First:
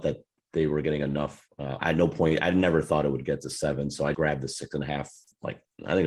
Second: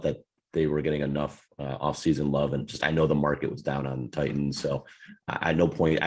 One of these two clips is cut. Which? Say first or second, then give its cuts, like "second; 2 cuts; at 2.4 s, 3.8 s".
first; 2 cuts; at 1.8 s, 4.1 s